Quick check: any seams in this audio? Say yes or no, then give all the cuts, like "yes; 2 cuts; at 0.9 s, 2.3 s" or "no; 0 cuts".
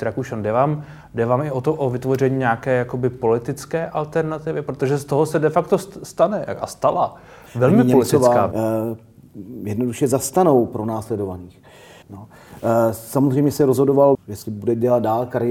yes; 3 cuts; at 8.5 s, 12.0 s, 14.1 s